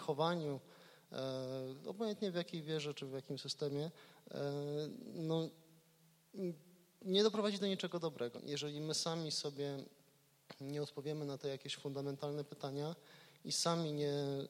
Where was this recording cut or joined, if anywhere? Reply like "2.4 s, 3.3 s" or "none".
8.3 s

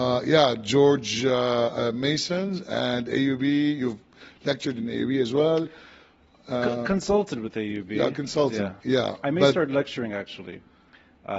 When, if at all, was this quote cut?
8.8 s

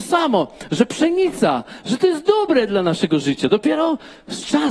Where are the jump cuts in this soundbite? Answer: none

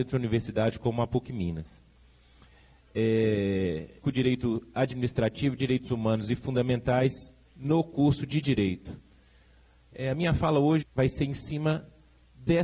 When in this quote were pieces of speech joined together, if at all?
4.0 s, 10.8 s

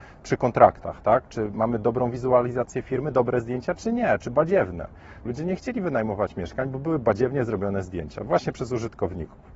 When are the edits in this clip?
5.3 s

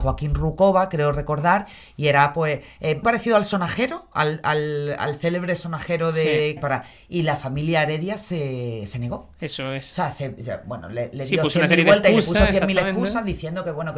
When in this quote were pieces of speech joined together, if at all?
3.0 s, 6.6 s

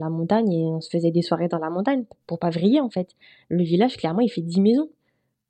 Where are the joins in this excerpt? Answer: none

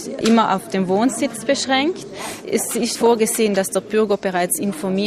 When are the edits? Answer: 2.9 s

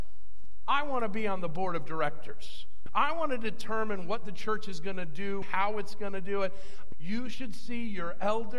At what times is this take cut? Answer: 2.9 s, 5.4 s, 6.9 s

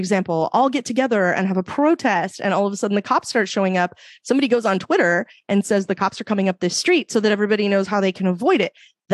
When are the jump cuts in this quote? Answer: none

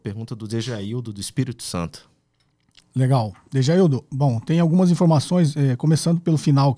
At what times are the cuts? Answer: none

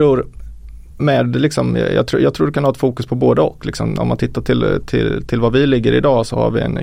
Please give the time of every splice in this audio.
1.0 s

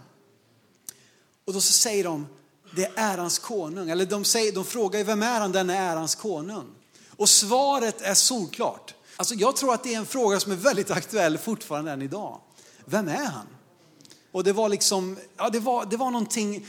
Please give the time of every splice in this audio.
9.2 s, 14.3 s

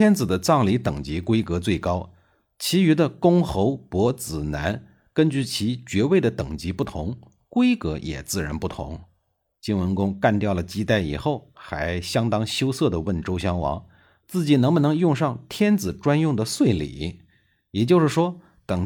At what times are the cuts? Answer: 9.6 s

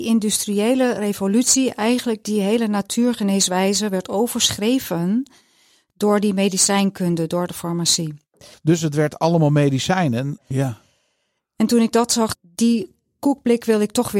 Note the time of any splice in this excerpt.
8.5 s, 10.4 s, 12.3 s

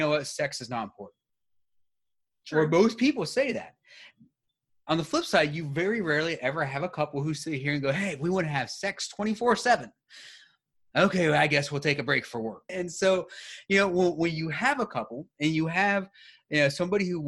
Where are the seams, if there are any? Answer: 12.7 s

